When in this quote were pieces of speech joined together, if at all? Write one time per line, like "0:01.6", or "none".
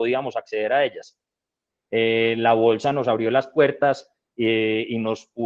0:01.7